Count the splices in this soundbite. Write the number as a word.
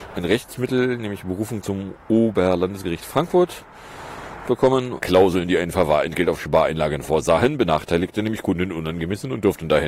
one